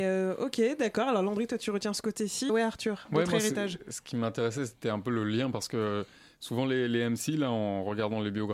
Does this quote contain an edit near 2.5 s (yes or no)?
yes